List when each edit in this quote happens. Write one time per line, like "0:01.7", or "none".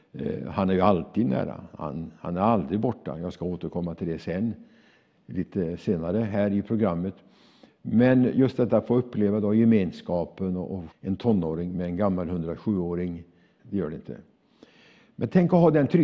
0:10.9
0:13.6